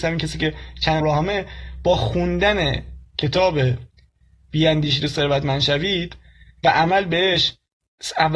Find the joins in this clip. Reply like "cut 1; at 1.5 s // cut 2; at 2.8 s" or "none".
cut 1; at 1.0 s